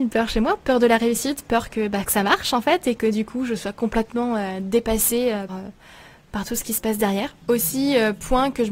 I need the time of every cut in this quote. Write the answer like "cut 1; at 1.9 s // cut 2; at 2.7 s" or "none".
cut 1; at 5.5 s